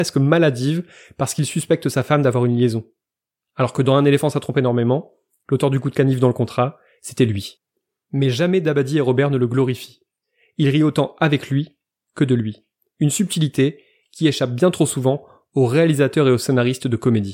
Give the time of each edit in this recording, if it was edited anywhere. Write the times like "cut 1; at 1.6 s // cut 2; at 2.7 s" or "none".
none